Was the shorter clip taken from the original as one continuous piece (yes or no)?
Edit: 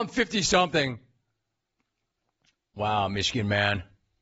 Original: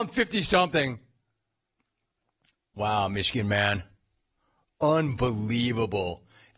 yes